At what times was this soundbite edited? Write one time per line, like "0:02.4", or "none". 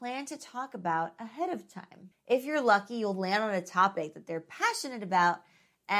0:02.1